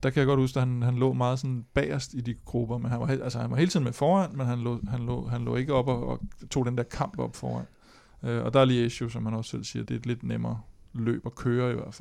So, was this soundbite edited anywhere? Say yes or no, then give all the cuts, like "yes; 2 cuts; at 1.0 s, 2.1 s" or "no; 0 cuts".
yes; 1 cut; at 9.9 s